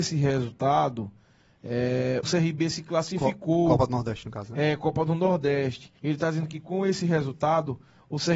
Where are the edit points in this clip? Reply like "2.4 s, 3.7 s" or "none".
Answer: 2.2 s, 6.0 s